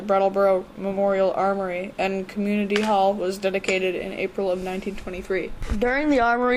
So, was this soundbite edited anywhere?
no; 0 cuts

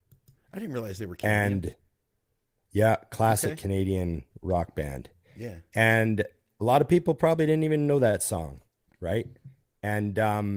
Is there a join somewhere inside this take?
no; 0 cuts

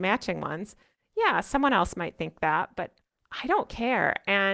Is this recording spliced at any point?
no; 0 cuts

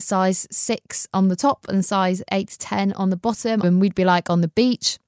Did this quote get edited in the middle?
yes; 1 cut; at 3.6 s

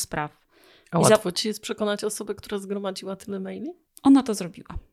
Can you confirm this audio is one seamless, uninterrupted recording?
no; 1 cut; at 3.9 s

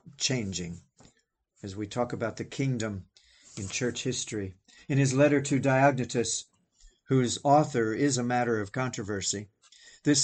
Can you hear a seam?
no; 0 cuts

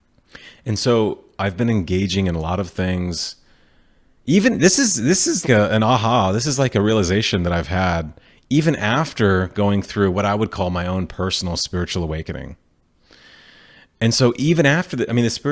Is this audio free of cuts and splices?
no; 1 cut; at 5.4 s

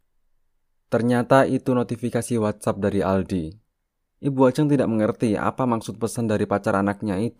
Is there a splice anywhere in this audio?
no; 0 cuts

